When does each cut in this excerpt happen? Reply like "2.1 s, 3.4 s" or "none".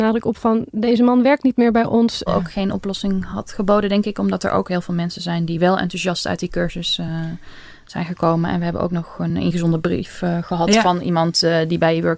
2.3 s